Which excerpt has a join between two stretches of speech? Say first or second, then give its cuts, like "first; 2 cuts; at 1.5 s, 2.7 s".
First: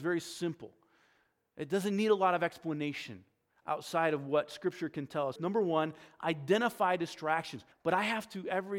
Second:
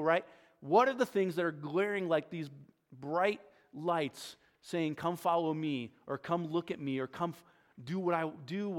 first; 2 cuts; at 5.4 s, 7.7 s